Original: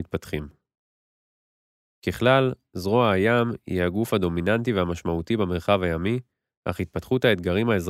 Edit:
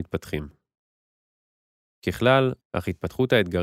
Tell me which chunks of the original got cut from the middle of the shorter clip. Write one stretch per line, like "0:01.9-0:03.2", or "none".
0:02.6-0:06.5